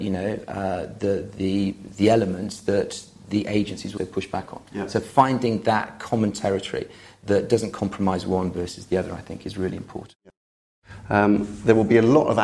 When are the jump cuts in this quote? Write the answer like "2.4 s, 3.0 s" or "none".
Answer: 4.0 s